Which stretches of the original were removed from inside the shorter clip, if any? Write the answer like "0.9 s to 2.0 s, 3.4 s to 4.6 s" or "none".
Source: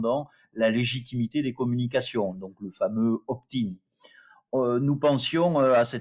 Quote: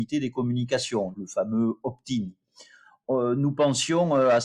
2.3 s to 2.6 s